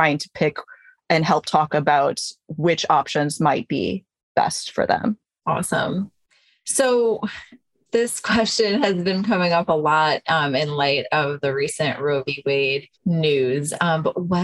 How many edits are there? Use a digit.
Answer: 1